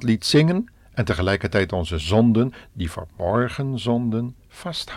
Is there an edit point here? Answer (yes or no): no